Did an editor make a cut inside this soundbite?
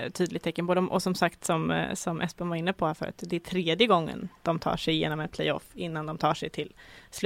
no; 0 cuts

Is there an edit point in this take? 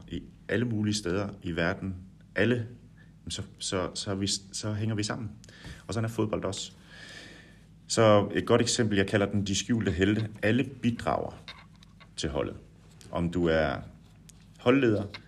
no; 0 cuts

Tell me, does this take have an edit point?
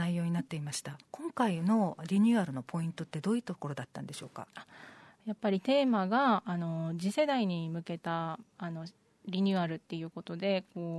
yes; 1 cut; at 1.0 s

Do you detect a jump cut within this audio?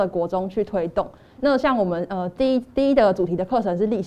no; 0 cuts

